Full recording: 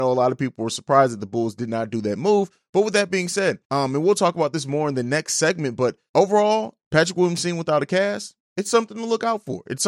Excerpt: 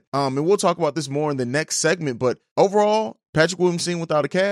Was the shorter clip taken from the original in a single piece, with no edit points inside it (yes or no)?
yes